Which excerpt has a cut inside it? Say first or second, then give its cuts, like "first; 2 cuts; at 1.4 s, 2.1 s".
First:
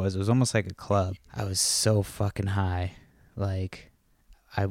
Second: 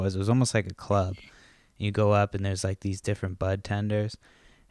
first; 1 cut; at 1.2 s